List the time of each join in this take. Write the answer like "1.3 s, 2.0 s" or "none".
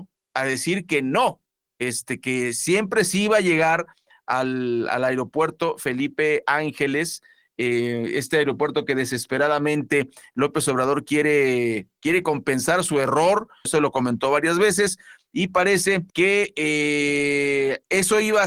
13.6 s, 16.1 s